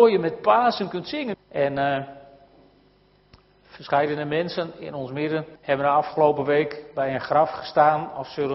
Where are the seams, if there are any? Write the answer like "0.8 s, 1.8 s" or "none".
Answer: 1.3 s, 5.6 s